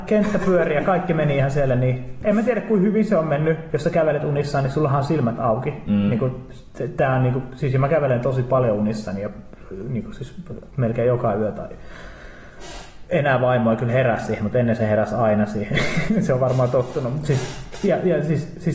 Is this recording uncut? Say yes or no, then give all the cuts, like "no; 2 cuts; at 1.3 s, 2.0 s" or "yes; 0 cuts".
no; 1 cut; at 3.7 s